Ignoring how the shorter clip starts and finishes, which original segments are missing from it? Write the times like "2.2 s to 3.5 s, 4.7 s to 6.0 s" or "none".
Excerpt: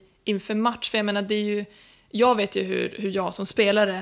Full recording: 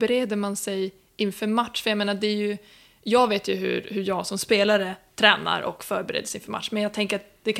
none